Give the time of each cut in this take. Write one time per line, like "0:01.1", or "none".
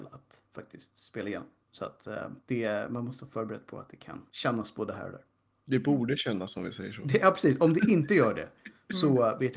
0:04.3